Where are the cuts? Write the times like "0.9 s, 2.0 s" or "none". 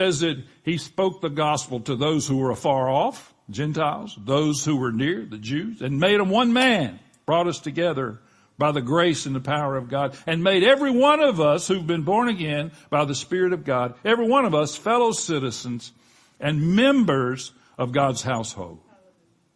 none